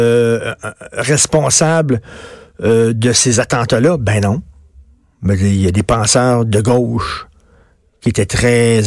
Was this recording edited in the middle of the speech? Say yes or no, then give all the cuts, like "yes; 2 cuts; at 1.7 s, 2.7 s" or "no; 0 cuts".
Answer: no; 0 cuts